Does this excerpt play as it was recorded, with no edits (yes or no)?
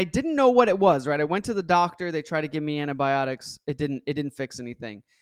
yes